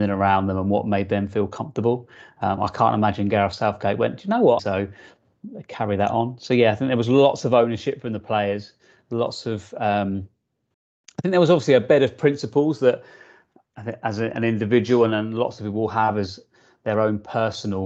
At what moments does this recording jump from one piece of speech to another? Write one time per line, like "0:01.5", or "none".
0:04.6